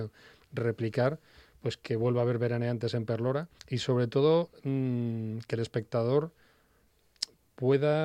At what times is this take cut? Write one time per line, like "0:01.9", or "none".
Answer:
0:03.6

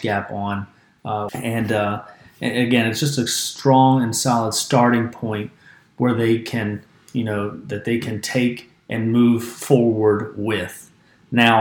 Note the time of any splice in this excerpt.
0:01.3

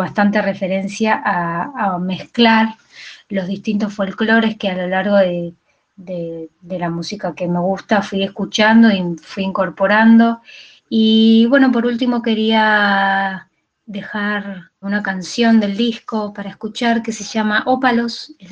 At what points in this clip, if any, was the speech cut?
0:10.8
0:14.8

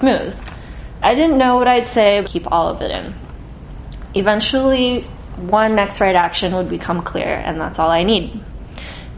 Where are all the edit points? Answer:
0:02.2

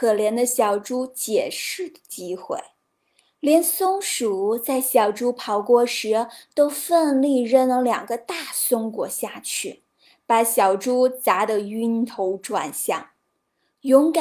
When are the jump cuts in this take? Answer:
none

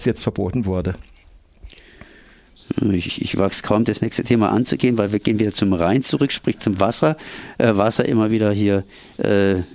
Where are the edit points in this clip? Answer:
0:03.1

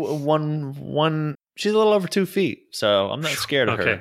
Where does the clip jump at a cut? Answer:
0:01.3

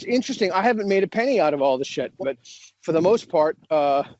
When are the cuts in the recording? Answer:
0:02.2

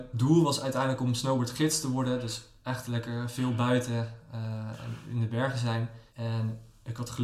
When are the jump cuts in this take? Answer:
0:06.1

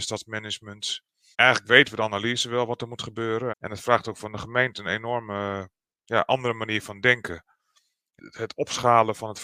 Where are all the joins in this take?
0:01.3
0:03.5
0:08.2

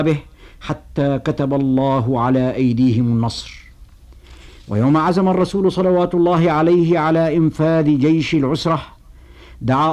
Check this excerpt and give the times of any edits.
none

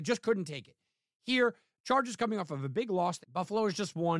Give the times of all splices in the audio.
0:03.2

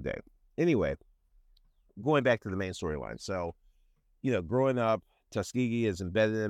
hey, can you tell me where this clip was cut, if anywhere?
none

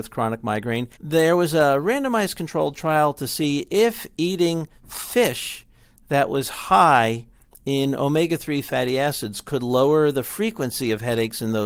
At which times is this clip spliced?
0:01.0

